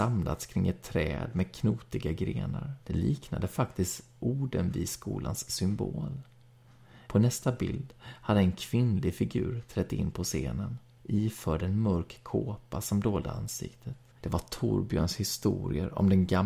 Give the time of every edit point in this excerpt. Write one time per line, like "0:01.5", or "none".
0:02.8
0:07.1
0:14.1